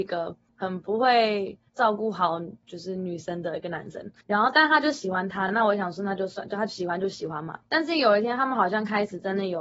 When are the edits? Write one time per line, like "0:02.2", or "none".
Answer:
none

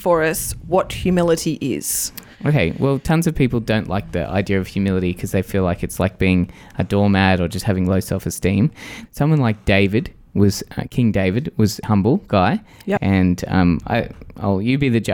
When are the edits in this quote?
0:09.1
0:11.8
0:13.0

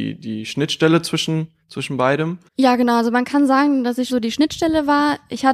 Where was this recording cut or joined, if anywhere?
0:02.5
0:04.1

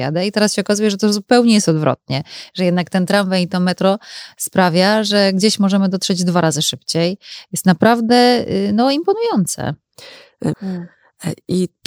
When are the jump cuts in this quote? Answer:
0:10.5

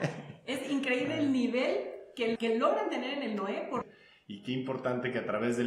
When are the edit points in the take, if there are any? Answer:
0:02.3
0:03.8

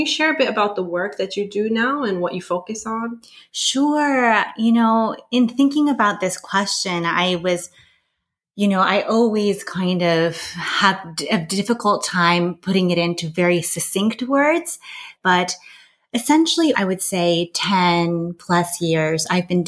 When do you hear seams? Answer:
0:15.2
0:16.7

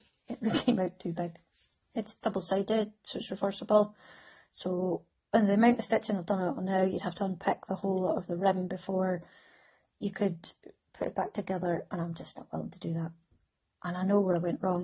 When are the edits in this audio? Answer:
none

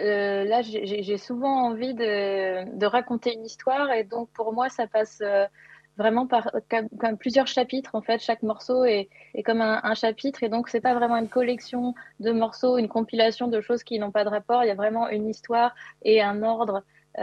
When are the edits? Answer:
none

